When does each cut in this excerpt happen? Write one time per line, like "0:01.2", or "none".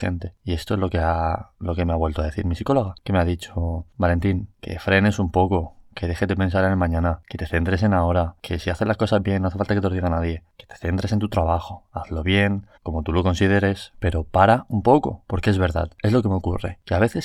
0:12.8
0:13.9